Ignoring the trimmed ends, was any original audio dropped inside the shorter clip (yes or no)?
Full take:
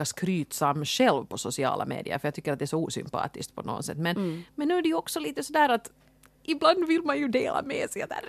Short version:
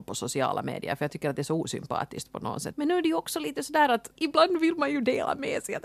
yes